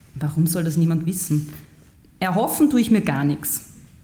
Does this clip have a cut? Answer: no; 0 cuts

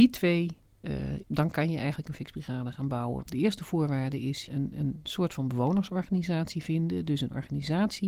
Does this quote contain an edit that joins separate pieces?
yes; 3 cuts; at 1.2 s, 3.2 s, 4.5 s

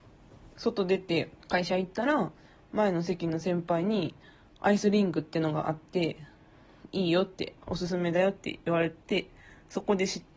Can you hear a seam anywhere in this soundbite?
yes; 2 cuts; at 1.4 s, 7.6 s

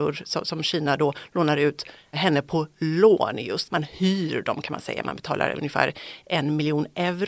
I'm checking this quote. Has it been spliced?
yes; 1 cut; at 3.7 s

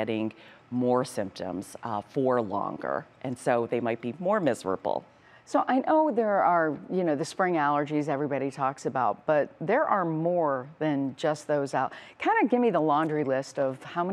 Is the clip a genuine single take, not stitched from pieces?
yes; 0 cuts

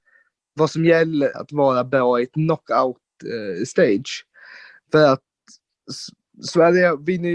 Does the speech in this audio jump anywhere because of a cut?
yes; 1 cut; at 1.3 s

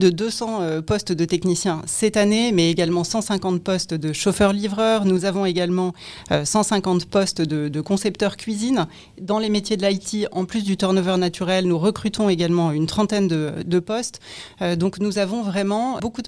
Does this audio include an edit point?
no; 0 cuts

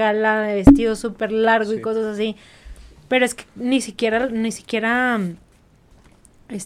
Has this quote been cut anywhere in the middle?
no; 0 cuts

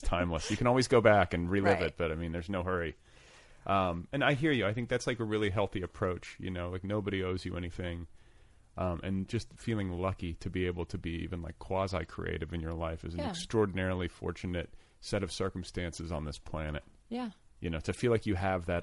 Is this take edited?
no; 0 cuts

